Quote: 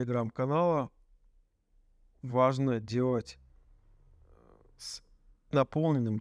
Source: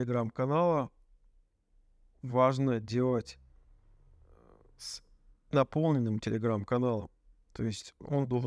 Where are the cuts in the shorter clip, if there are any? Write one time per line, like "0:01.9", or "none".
none

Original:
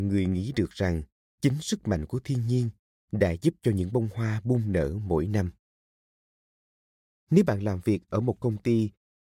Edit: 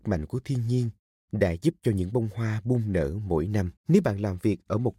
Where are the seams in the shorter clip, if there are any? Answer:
0:03.8

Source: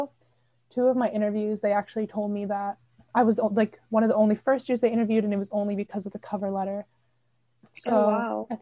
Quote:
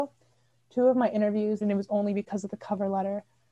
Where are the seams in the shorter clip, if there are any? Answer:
0:01.6

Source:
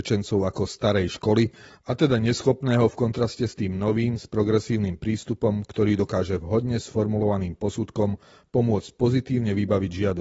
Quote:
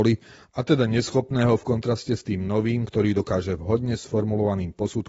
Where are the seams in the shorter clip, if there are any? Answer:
0:02.8

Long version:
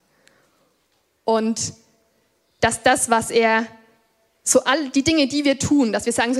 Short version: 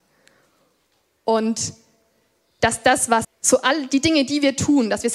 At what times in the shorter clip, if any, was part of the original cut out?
0:03.2

